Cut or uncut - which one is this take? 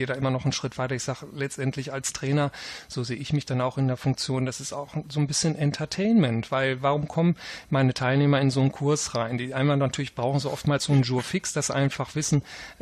uncut